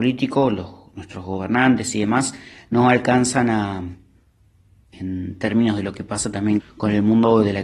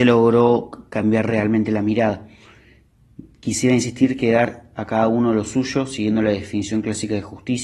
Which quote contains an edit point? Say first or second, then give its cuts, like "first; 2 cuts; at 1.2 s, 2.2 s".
first; 2 cuts; at 4.9 s, 6.6 s